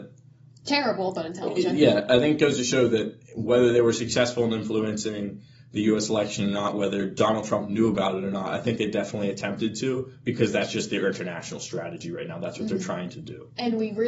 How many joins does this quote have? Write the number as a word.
zero